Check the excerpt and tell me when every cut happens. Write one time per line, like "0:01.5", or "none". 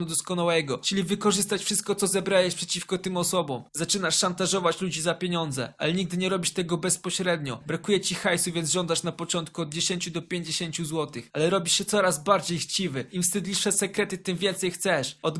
0:07.6

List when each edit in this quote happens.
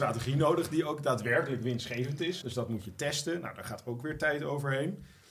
0:02.4

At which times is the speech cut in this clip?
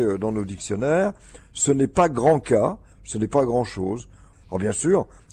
0:02.9
0:04.3

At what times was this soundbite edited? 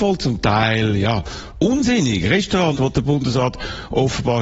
0:02.8

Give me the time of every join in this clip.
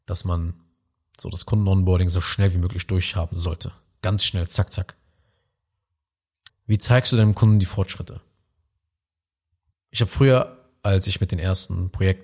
0:06.5
0:09.7

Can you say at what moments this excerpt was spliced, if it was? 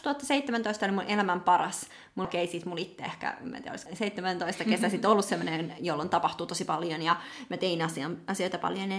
0:02.2
0:03.9

